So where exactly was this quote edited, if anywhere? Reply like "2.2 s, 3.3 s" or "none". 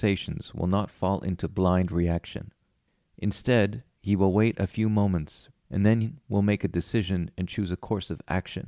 5.5 s